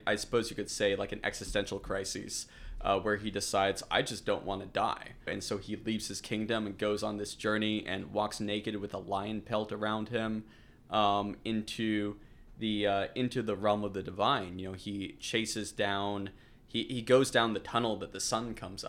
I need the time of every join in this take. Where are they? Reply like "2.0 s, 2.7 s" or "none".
5.3 s